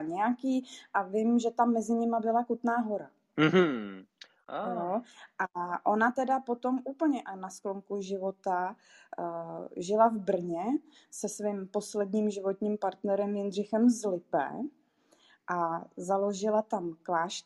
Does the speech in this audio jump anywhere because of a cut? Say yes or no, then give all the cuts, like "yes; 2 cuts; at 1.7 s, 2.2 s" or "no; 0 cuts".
no; 0 cuts